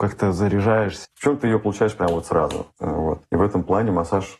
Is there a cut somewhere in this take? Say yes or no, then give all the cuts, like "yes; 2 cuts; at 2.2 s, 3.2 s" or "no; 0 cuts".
yes; 1 cut; at 1.0 s